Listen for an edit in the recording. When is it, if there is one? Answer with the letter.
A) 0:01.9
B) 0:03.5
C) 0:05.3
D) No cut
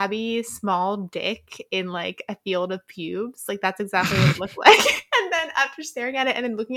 D